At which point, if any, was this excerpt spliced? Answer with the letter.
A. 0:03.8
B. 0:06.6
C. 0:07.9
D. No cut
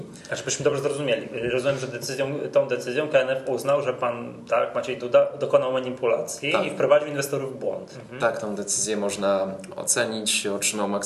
C